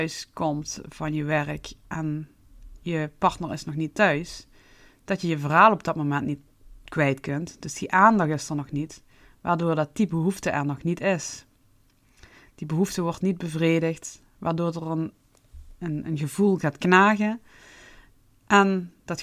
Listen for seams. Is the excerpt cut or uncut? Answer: uncut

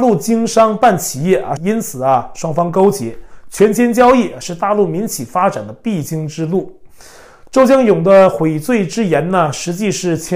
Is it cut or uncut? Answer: cut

